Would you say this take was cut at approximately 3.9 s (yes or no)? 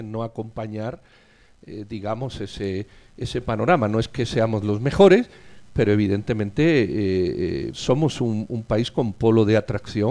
no